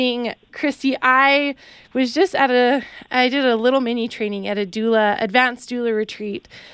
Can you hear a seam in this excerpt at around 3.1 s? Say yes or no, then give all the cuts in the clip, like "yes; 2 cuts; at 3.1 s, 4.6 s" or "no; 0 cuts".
no; 0 cuts